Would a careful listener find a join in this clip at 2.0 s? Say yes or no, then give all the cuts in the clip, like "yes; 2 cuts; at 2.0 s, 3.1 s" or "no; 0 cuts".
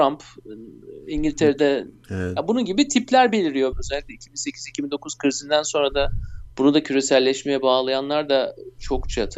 yes; 2 cuts; at 2.0 s, 3.7 s